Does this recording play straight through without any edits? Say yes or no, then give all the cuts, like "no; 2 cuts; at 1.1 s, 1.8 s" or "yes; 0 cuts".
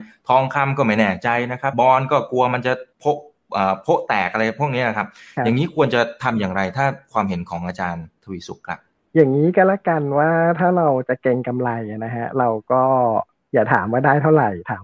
no; 2 cuts; at 1.7 s, 2.9 s